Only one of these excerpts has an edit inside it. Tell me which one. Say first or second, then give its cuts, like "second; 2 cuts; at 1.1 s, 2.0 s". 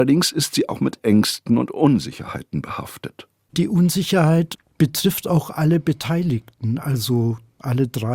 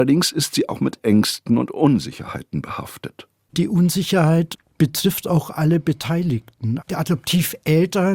second; 1 cut; at 6.8 s